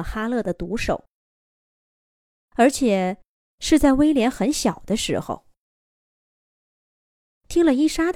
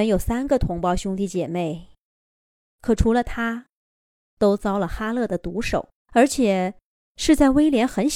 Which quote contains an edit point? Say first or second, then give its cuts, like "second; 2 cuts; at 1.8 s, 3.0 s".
second; 1 cut; at 6.0 s